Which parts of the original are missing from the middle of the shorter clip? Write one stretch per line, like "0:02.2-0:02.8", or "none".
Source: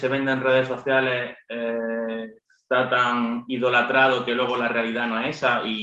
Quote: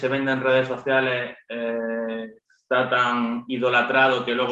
none